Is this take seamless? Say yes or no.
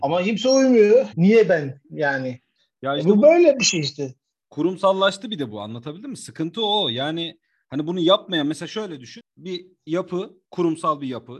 no